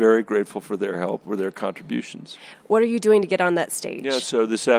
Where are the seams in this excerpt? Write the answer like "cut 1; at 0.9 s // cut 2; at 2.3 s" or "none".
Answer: cut 1; at 2.5 s